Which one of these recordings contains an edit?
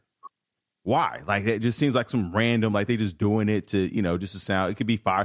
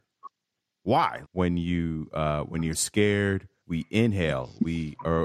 second; 2 cuts; at 1.2 s, 3.6 s

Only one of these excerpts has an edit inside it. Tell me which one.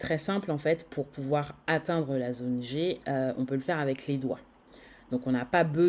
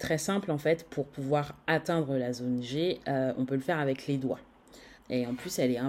second; 1 cut; at 5.0 s

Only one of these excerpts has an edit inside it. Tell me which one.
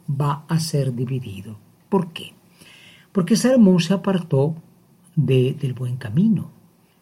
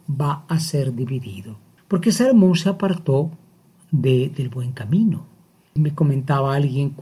second; 2 cuts; at 1.8 s, 5.8 s

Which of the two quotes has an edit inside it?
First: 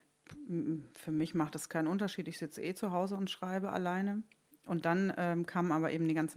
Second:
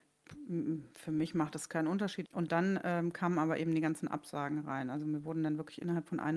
second; 1 cut; at 2.3 s

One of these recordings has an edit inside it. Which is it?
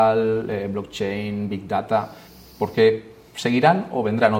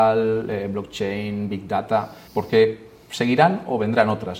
second; 1 cut; at 2.3 s

